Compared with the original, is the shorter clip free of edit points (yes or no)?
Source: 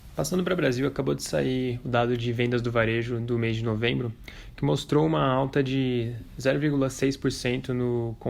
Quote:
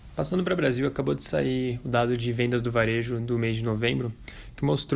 yes